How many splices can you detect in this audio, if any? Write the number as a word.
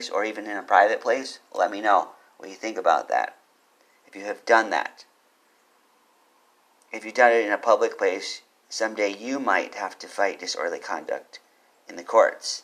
zero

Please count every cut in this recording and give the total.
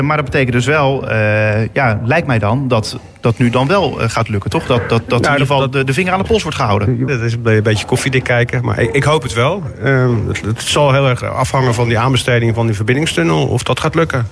one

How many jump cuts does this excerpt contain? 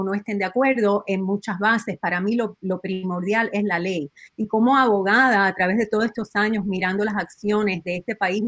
zero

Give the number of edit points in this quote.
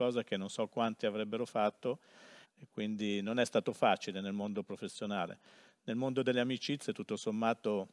one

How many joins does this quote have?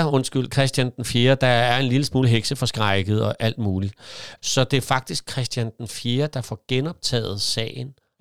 one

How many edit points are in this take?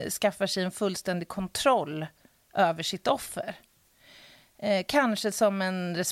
zero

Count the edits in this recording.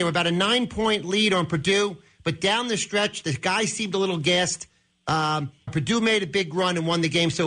one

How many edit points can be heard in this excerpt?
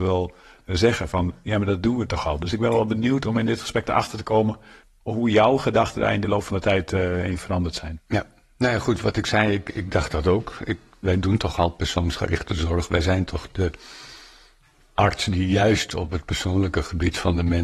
zero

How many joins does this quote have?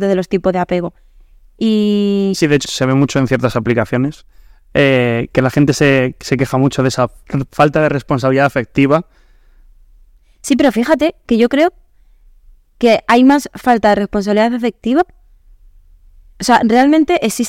one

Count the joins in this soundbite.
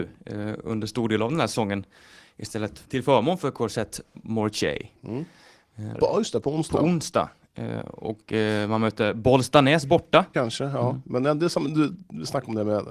three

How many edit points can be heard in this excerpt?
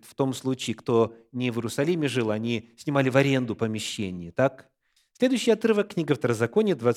one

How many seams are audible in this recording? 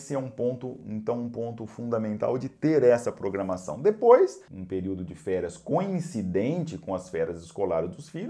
one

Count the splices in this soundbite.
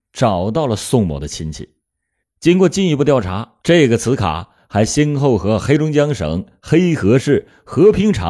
two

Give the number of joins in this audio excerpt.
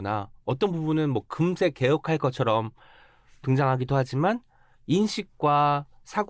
zero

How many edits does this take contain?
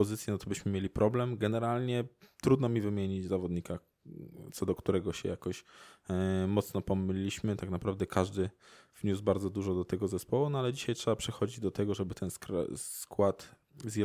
zero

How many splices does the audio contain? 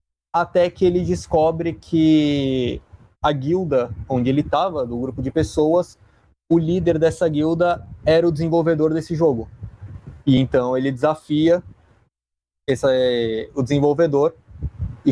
zero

